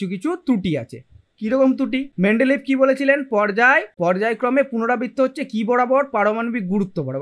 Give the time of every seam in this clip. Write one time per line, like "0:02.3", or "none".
0:02.1